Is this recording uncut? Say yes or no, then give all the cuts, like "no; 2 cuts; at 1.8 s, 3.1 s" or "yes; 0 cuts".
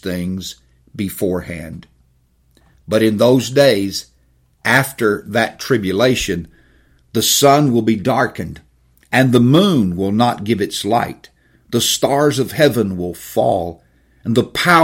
yes; 0 cuts